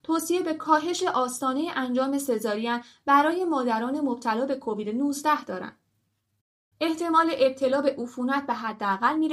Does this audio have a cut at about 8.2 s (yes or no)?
no